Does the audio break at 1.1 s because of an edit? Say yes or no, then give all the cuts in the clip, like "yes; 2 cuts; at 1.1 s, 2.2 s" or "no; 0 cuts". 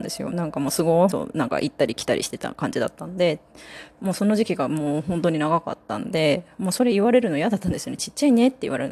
yes; 1 cut; at 1.1 s